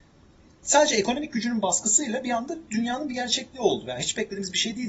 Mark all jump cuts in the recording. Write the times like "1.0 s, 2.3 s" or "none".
none

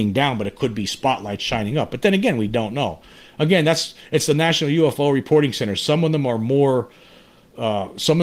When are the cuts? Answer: none

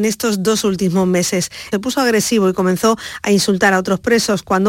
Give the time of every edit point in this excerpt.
1.7 s

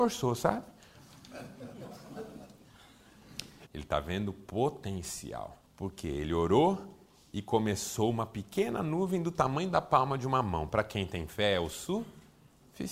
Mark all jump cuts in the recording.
3.6 s, 5.7 s

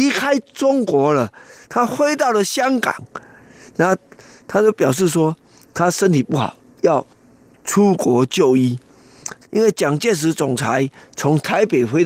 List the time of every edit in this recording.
9.4 s

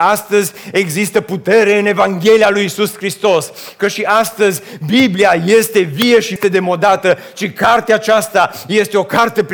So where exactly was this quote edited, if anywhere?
6.4 s

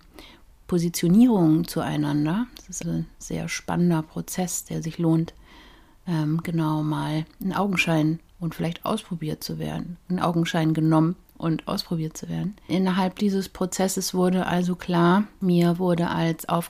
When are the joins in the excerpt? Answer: 2.8 s

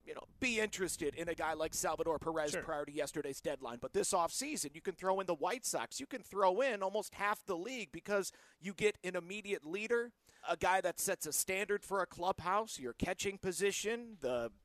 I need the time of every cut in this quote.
10.4 s

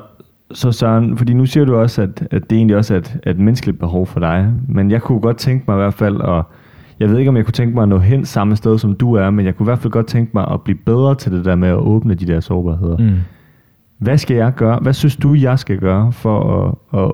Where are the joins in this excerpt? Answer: none

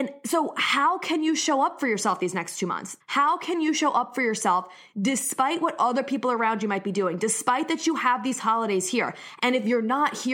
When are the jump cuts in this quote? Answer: 3.0 s, 9.4 s

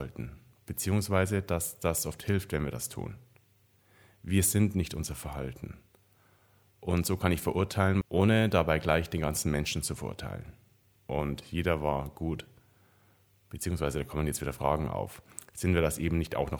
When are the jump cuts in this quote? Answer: 8.0 s, 11.0 s

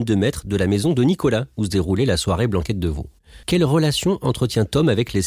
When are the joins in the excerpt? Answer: 3.4 s

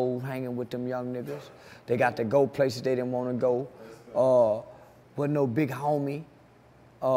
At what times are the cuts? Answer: 5.0 s

